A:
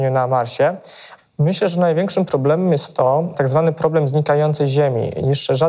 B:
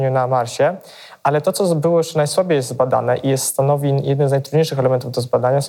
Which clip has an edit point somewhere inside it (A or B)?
A